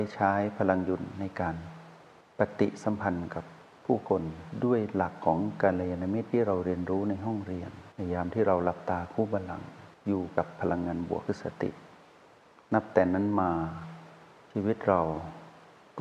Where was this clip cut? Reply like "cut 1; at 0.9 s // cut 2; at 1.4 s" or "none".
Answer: cut 1; at 7.9 s